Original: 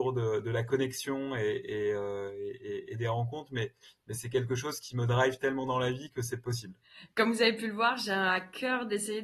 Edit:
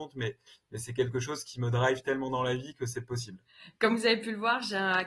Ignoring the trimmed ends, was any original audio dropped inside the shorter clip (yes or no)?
no